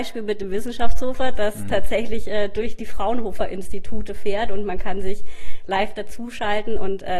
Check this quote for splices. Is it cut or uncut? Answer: uncut